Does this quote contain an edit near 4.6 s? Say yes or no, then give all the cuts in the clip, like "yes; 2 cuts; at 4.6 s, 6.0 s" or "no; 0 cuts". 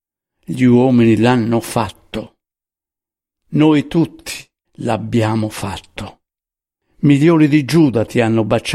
yes; 1 cut; at 4.6 s